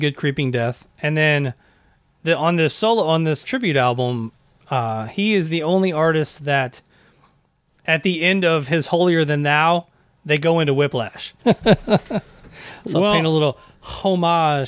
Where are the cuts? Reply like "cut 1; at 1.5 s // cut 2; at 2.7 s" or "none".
cut 1; at 3.4 s // cut 2; at 11.4 s